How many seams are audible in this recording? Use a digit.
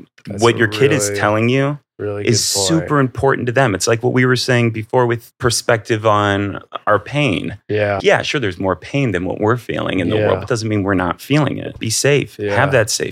1